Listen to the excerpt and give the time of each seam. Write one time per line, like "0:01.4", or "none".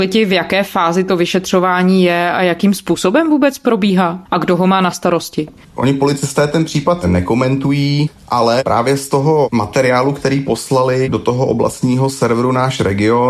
none